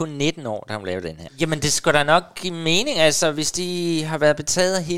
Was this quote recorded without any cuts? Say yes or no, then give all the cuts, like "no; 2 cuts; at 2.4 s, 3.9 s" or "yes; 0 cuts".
no; 1 cut; at 1.3 s